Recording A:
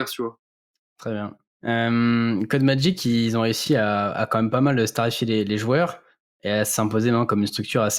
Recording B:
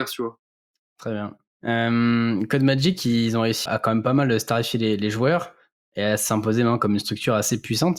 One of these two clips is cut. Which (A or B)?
B